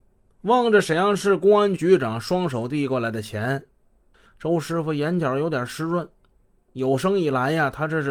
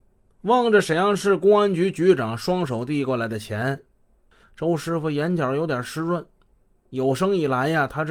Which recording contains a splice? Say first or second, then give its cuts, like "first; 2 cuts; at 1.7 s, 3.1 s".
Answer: first; 1 cut; at 1.8 s